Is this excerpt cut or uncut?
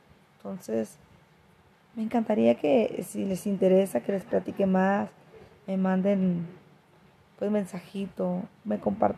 uncut